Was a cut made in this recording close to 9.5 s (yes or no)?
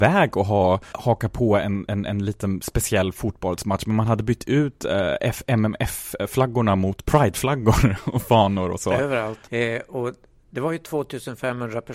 yes